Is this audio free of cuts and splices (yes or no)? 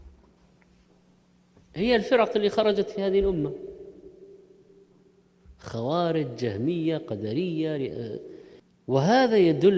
yes